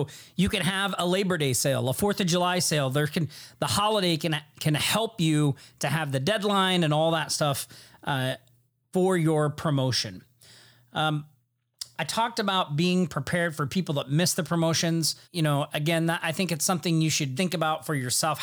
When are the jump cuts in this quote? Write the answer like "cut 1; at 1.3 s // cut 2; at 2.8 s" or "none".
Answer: cut 1; at 15.2 s // cut 2; at 17.3 s